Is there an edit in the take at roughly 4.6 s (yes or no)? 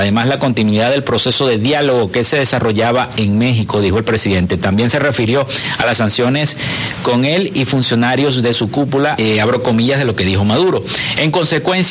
no